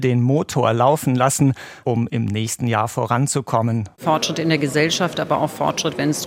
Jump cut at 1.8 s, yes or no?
yes